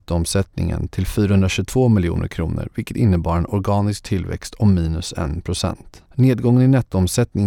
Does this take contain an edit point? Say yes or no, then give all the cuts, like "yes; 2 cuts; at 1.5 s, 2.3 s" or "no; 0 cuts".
yes; 1 cut; at 6.1 s